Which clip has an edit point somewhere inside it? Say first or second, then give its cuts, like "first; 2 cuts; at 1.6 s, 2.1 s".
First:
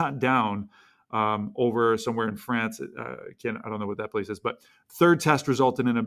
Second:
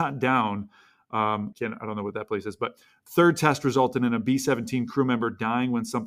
second; 1 cut; at 1.5 s